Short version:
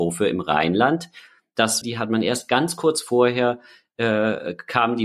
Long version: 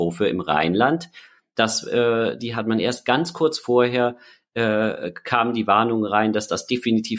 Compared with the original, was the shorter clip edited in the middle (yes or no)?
yes